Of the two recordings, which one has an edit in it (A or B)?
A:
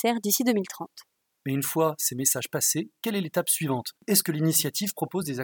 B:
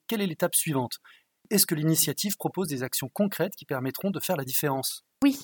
A